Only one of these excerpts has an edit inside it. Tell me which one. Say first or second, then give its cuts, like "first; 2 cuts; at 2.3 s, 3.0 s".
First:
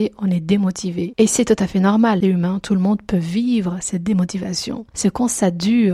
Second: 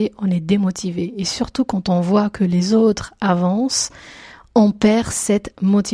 first; 2 cuts; at 1.1 s, 4.9 s